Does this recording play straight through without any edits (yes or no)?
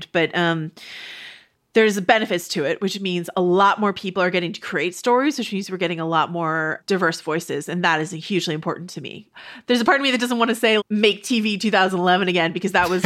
no